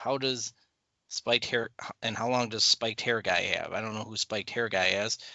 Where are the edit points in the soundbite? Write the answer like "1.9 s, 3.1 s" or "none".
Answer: none